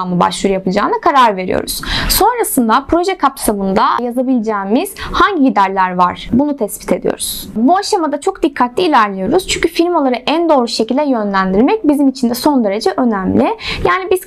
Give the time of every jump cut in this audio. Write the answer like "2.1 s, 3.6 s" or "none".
none